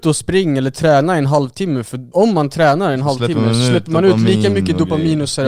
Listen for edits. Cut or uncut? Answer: cut